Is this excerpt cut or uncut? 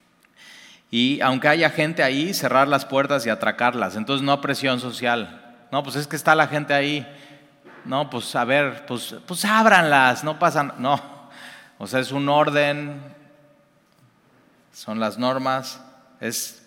uncut